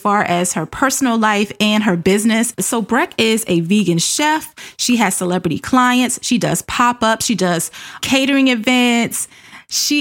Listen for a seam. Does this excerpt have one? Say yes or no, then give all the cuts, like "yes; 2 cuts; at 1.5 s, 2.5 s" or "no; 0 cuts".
no; 0 cuts